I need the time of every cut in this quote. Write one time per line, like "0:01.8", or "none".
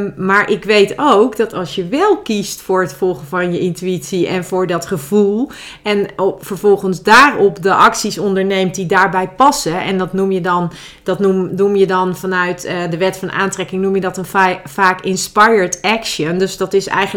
none